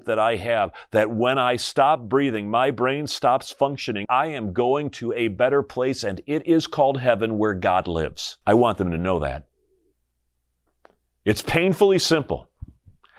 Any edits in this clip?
yes; 2 cuts; at 4.1 s, 8.4 s

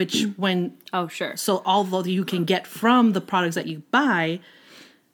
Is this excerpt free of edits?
yes; 0 cuts

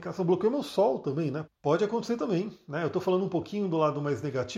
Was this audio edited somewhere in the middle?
yes; 1 cut; at 1.4 s

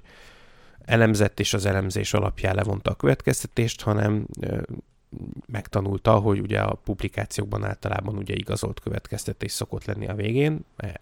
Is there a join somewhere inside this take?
no; 0 cuts

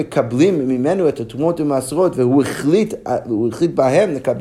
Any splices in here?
no; 0 cuts

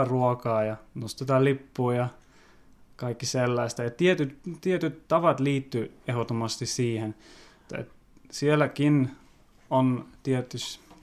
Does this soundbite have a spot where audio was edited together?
yes; 1 cut; at 7.7 s

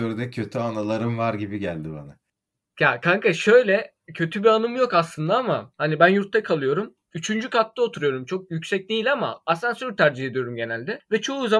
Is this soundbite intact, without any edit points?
yes; 0 cuts

